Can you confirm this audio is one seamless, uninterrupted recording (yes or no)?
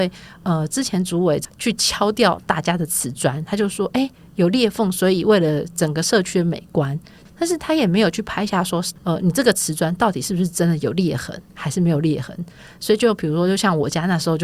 yes